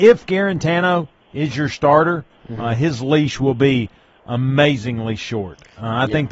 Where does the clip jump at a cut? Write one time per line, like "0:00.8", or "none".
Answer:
none